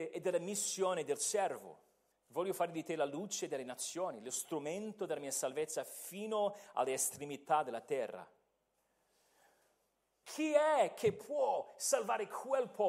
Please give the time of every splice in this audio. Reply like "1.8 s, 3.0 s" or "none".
2.1 s, 10.2 s